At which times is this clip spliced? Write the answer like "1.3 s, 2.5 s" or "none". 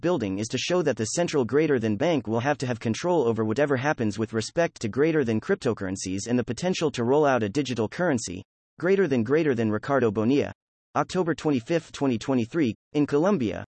10.9 s, 12.7 s